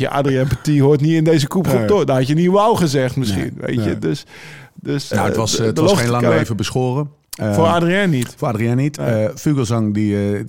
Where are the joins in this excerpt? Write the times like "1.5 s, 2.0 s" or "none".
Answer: 5.1 s